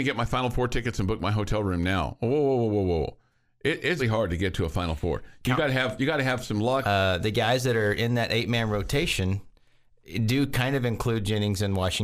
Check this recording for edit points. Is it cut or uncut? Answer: cut